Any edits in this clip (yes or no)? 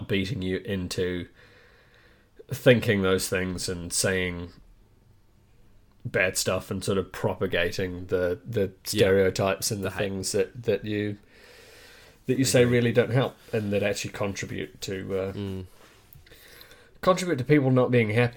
no